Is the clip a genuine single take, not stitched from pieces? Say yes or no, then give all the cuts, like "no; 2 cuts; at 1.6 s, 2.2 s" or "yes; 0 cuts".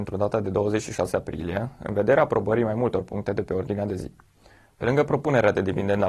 no; 1 cut; at 4.7 s